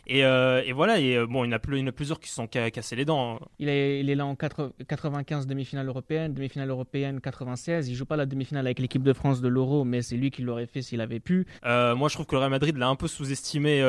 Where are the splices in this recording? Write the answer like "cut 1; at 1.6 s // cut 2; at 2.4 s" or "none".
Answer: cut 1; at 3.5 s // cut 2; at 11.6 s